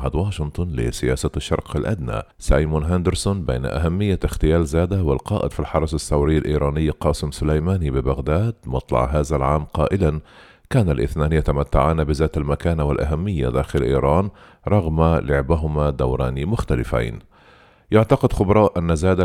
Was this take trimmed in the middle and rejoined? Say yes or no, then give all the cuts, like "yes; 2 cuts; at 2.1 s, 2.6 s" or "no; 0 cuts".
yes; 1 cut; at 2.3 s